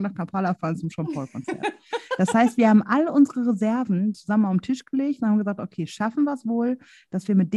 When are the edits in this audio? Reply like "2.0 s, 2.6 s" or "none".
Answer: 4.1 s